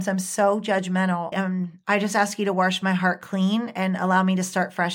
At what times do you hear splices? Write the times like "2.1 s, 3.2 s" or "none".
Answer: 1.3 s